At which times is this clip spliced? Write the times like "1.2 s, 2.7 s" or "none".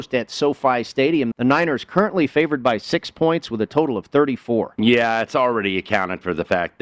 1.3 s